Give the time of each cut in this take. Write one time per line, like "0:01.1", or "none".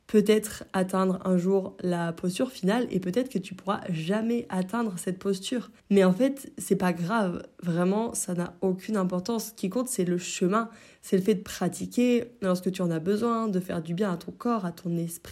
0:05.8